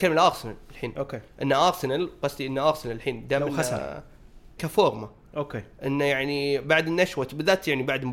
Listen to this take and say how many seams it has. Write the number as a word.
one